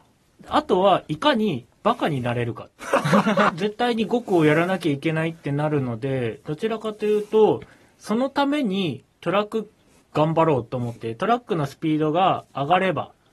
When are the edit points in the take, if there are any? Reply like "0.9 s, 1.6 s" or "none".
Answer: 3.5 s, 11.0 s